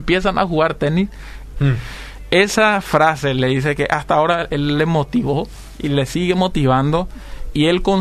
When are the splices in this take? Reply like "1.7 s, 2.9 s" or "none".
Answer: 1.5 s